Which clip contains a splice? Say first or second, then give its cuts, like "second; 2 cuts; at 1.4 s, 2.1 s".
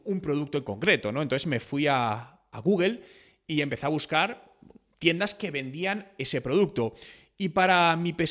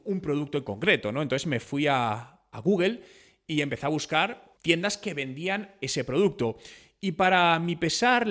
second; 1 cut; at 4.6 s